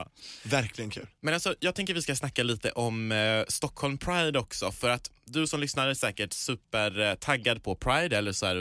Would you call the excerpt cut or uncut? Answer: uncut